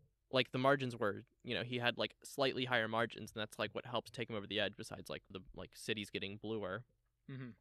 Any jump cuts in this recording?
yes; 1 cut; at 5.3 s

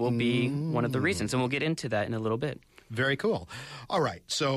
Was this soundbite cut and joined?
no; 0 cuts

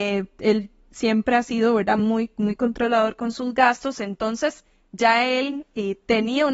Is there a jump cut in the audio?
no; 0 cuts

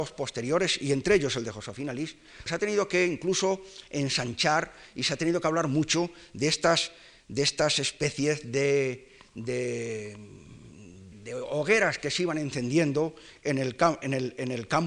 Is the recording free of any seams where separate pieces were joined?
no; 2 cuts; at 2.5 s, 11.1 s

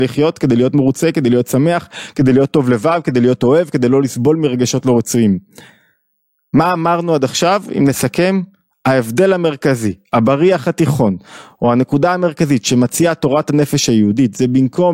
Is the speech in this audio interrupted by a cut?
no; 0 cuts

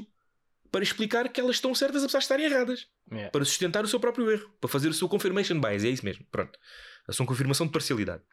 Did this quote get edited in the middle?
no; 0 cuts

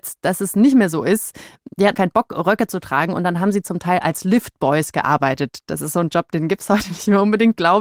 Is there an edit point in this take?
yes; 1 cut; at 1.9 s

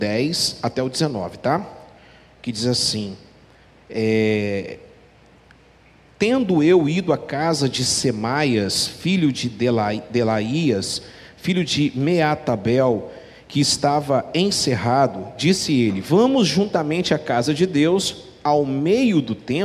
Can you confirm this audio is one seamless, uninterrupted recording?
yes; 0 cuts

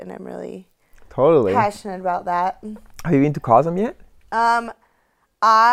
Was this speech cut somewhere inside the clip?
no; 0 cuts

